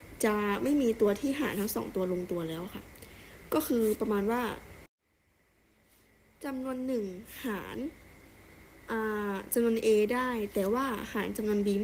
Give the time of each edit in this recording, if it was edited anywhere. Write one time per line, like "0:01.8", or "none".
none